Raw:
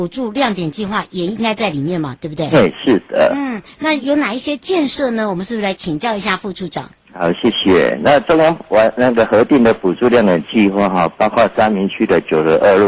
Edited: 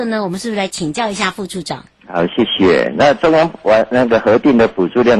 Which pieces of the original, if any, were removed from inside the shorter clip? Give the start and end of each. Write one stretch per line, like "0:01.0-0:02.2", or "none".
none